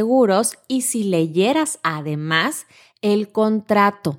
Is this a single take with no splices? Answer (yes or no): yes